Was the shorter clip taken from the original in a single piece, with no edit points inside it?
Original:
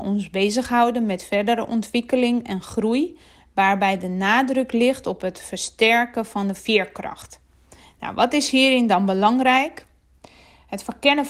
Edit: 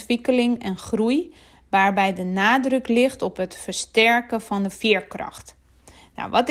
yes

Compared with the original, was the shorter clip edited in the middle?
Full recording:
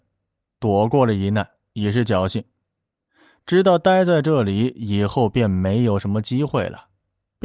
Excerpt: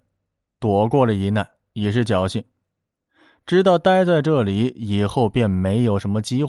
no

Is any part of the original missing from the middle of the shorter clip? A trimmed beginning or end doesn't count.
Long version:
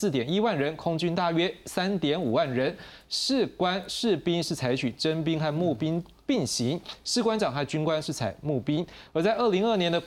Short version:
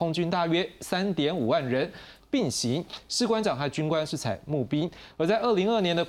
yes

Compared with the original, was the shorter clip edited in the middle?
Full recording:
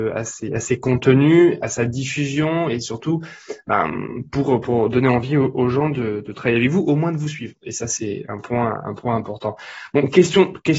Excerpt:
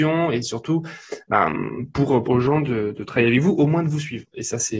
yes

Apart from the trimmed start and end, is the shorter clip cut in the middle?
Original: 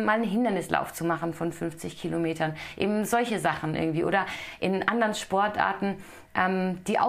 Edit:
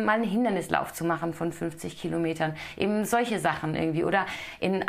no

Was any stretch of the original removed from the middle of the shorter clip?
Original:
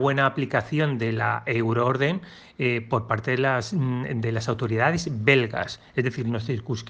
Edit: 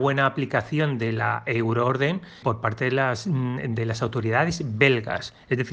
yes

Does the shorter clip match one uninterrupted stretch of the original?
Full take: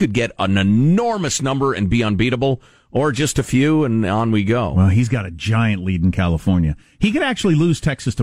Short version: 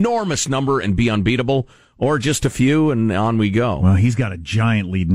yes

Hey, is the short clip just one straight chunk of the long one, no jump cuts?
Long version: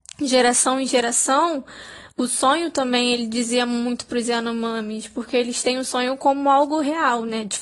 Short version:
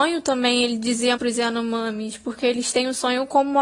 no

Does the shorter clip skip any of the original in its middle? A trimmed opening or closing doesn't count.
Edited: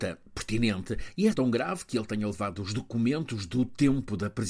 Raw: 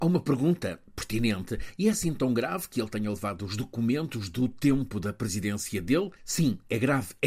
yes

